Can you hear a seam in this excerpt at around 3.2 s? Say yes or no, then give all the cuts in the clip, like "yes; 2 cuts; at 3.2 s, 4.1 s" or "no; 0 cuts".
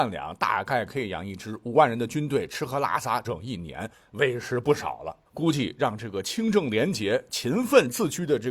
yes; 1 cut; at 3.2 s